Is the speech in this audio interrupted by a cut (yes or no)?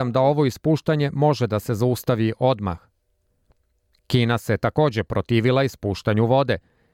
no